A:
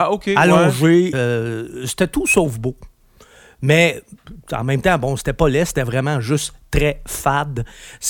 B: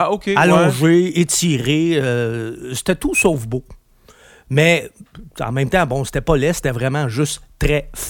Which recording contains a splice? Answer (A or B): A